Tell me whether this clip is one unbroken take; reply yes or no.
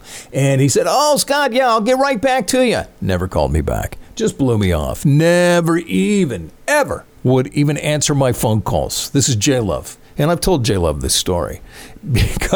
yes